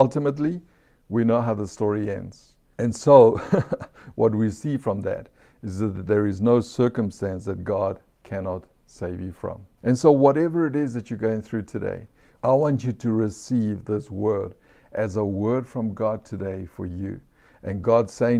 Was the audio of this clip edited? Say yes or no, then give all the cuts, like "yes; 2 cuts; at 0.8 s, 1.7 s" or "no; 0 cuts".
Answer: yes; 3 cuts; at 2.7 s, 9.8 s, 12.4 s